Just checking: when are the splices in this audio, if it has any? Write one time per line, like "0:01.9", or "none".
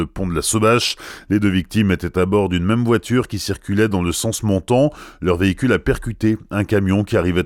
none